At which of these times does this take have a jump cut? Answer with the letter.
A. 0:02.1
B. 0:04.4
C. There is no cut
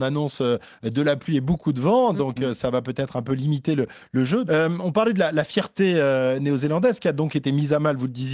B